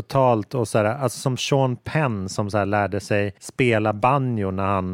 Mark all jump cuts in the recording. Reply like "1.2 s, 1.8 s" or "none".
3.4 s